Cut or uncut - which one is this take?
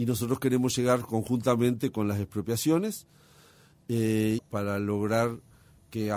cut